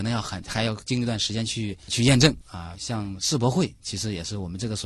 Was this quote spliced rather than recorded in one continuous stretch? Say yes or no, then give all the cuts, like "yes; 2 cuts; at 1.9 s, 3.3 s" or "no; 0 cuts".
yes; 1 cut; at 2.4 s